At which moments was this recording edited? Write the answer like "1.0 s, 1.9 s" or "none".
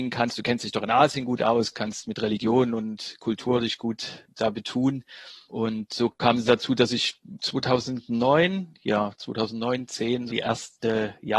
10.3 s